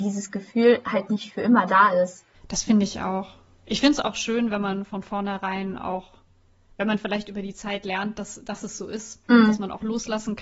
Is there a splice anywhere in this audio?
yes; 1 cut; at 2.3 s

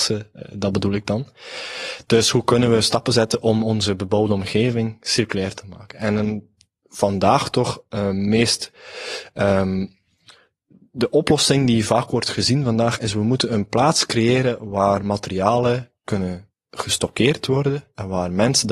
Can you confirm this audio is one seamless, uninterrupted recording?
yes; 0 cuts

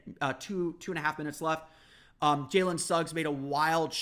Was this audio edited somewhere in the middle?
no; 0 cuts

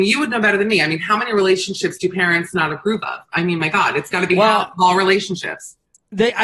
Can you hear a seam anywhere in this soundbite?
no; 0 cuts

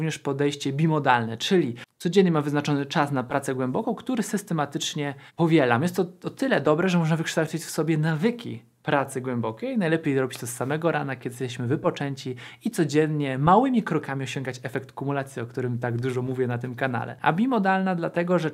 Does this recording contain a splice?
yes; 2 cuts; at 5.3 s, 17.2 s

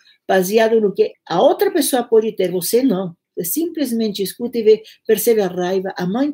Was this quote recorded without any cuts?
no; 2 cuts; at 1.1 s, 3.2 s

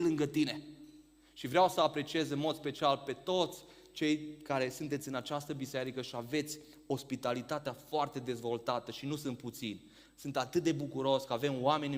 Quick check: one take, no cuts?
yes; 0 cuts

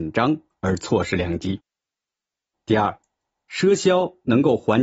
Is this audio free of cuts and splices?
no; 1 cut; at 2.5 s

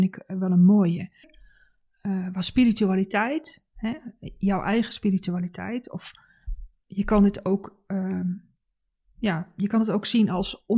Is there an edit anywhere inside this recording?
yes; 1 cut; at 1.2 s

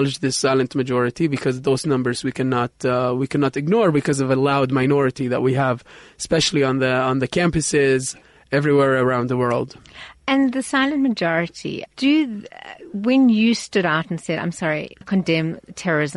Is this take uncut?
no; 2 cuts; at 11.9 s, 15.0 s

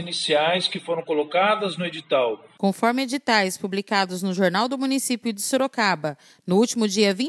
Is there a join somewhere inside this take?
no; 0 cuts

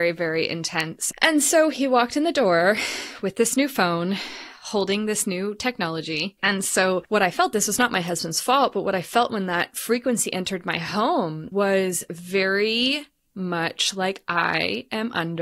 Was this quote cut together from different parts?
yes; 2 cuts; at 1.1 s, 6.4 s

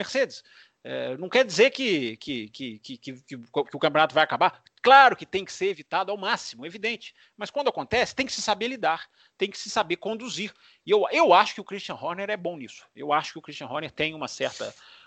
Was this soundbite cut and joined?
no; 0 cuts

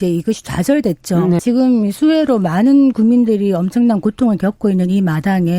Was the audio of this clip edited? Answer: yes; 1 cut; at 1.4 s

